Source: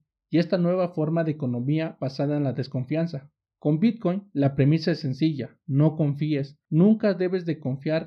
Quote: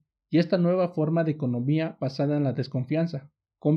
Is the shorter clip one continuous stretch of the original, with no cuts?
yes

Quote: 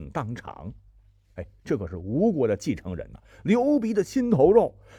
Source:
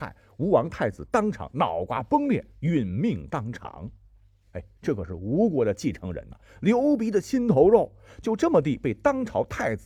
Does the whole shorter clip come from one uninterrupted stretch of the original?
yes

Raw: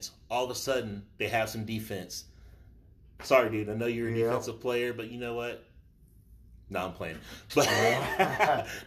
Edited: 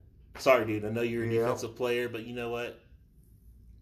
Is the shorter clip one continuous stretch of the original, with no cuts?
yes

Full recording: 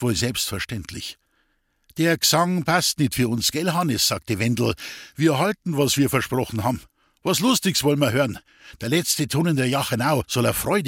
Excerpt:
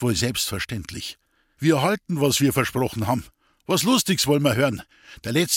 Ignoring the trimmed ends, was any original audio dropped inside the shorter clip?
yes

